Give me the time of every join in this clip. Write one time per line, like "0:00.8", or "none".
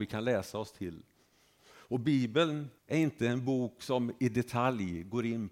0:01.6
0:02.8